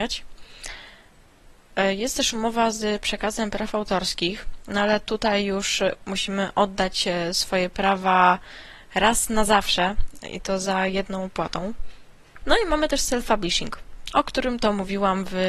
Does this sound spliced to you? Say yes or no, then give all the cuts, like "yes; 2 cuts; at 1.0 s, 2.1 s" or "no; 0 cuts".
yes; 1 cut; at 12.4 s